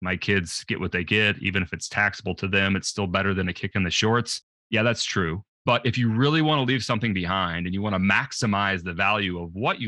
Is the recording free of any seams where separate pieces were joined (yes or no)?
yes